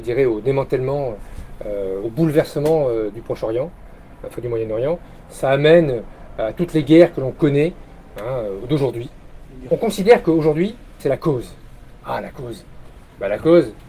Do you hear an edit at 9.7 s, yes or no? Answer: yes